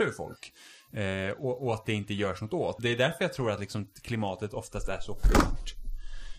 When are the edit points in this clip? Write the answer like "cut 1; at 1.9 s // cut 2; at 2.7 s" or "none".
cut 1; at 2.8 s

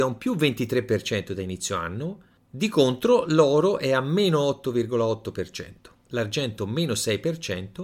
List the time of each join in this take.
none

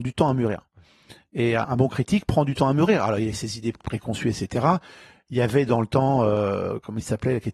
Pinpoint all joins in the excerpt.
cut 1; at 1.6 s

